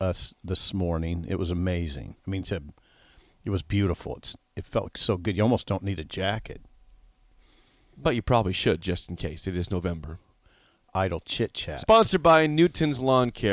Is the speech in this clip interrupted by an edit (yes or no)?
yes